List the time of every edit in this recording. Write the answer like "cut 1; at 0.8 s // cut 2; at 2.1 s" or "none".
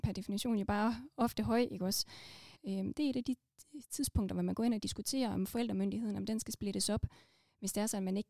cut 1; at 2.6 s